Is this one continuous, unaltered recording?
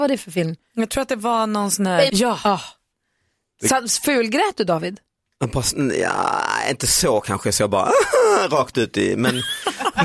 no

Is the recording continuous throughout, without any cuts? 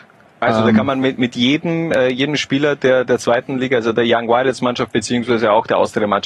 yes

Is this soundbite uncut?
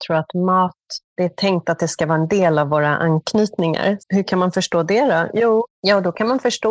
no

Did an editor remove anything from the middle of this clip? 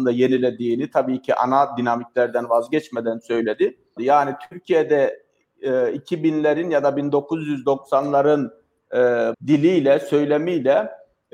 yes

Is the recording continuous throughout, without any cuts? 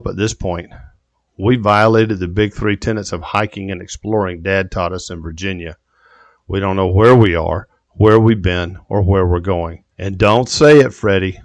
no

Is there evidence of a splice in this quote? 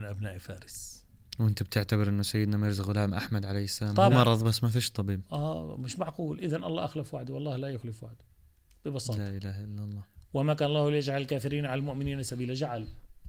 yes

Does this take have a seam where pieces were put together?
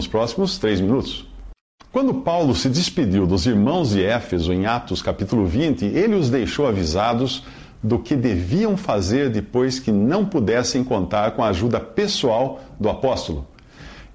no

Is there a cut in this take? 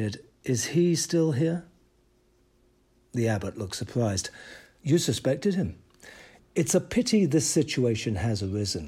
yes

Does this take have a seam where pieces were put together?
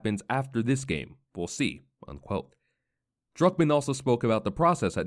no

